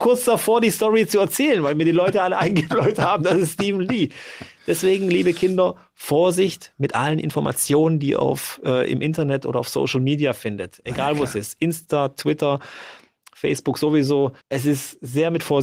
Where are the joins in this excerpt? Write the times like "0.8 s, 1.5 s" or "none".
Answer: 14.4 s